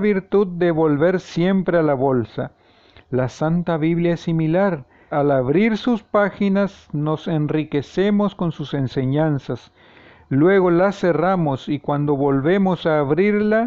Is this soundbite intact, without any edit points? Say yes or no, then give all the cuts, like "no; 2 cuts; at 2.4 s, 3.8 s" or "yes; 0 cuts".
no; 1 cut; at 5.1 s